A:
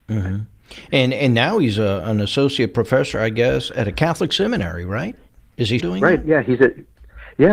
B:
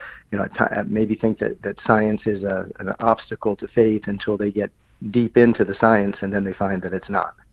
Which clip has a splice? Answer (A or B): A